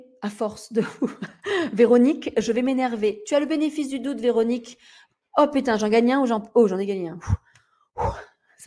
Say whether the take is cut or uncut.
uncut